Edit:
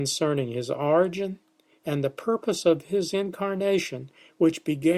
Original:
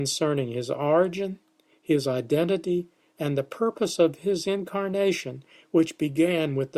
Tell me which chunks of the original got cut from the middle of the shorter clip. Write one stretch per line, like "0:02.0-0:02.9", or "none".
0:01.8-0:03.1